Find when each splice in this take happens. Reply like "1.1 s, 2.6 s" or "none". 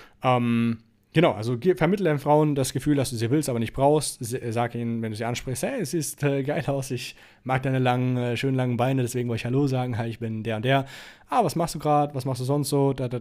none